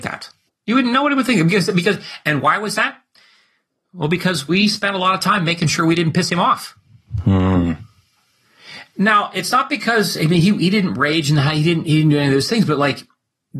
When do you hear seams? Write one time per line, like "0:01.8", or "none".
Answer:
none

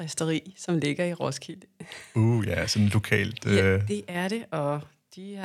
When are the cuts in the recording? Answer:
none

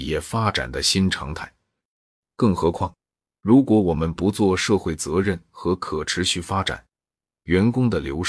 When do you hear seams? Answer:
0:02.2
0:07.2

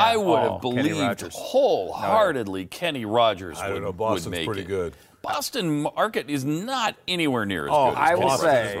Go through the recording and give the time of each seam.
none

